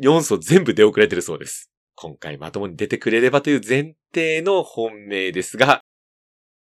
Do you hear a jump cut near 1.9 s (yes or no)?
yes